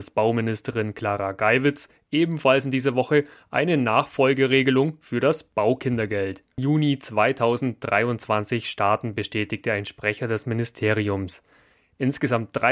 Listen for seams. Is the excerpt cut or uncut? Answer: cut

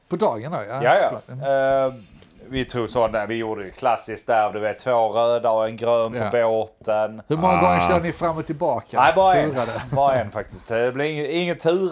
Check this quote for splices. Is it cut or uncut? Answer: uncut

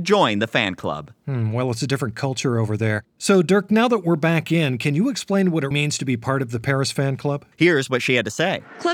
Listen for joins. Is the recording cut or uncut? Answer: cut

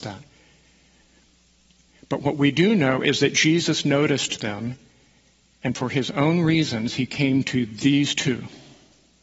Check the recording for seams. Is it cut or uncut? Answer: uncut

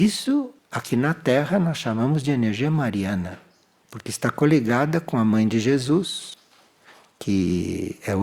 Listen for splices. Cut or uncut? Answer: uncut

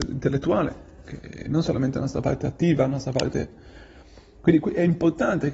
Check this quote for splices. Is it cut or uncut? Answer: uncut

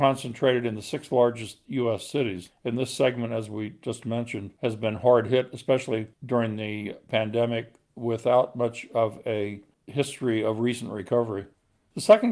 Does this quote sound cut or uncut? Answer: uncut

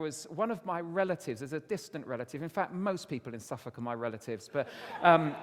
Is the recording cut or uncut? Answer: uncut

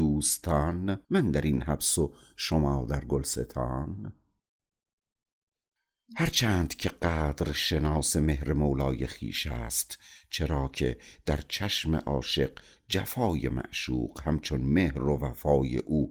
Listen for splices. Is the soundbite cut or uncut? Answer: cut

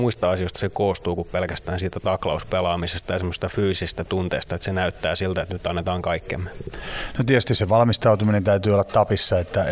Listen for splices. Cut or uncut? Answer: uncut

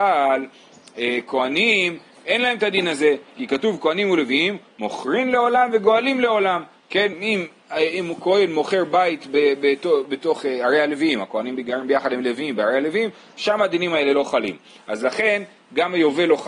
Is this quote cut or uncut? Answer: uncut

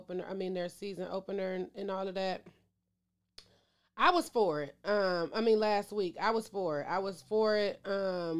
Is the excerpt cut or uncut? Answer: uncut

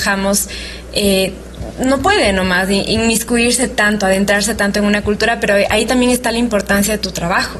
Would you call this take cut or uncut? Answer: uncut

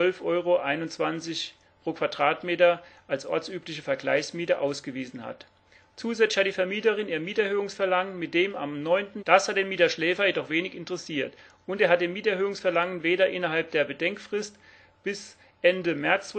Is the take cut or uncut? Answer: cut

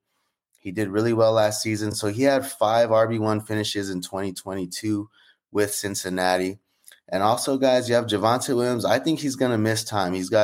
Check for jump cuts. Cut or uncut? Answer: uncut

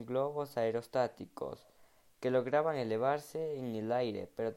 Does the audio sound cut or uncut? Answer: uncut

